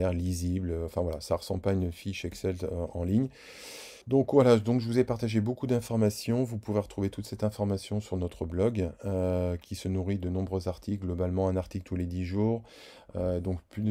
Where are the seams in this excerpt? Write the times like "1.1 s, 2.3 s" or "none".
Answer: 4.0 s